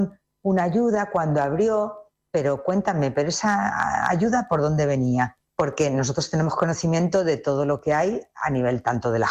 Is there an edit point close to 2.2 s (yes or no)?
yes